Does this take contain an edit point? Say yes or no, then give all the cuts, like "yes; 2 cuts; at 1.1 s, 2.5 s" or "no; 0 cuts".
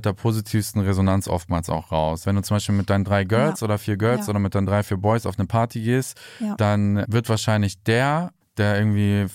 yes; 2 cuts; at 2.2 s, 8.4 s